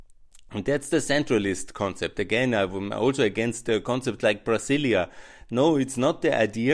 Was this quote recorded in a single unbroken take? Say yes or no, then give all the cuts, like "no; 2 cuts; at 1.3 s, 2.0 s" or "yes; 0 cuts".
yes; 0 cuts